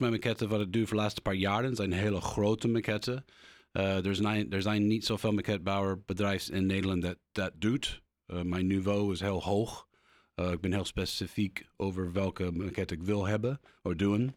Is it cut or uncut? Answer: uncut